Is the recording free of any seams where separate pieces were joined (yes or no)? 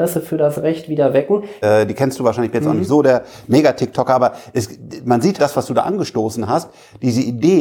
no